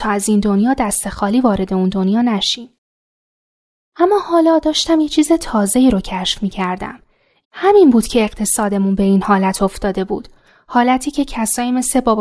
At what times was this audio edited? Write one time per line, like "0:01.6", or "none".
0:07.4